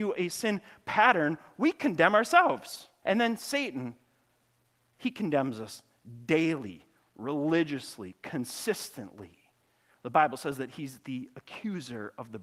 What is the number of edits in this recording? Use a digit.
1